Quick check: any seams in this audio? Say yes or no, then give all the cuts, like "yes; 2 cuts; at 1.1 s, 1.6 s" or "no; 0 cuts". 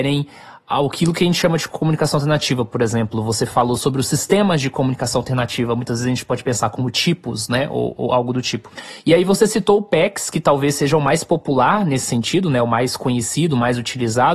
no; 0 cuts